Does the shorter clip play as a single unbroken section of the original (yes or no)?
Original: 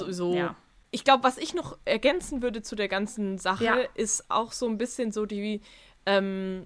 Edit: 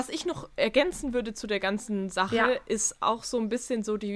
yes